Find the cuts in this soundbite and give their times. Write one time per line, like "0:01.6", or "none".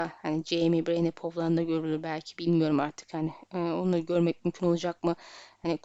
none